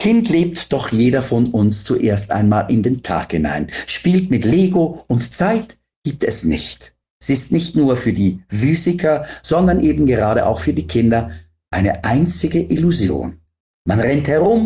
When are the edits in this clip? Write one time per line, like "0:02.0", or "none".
none